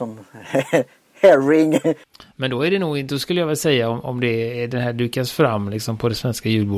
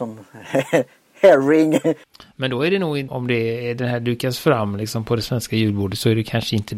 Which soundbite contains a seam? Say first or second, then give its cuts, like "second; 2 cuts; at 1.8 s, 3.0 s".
second; 1 cut; at 3.1 s